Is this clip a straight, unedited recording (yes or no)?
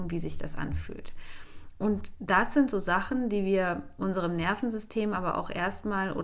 yes